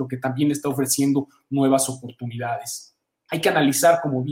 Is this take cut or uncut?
cut